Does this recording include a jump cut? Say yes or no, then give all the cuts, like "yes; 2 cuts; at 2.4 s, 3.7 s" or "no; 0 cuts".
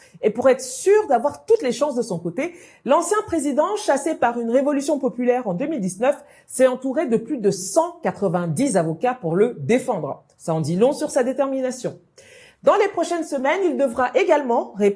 no; 0 cuts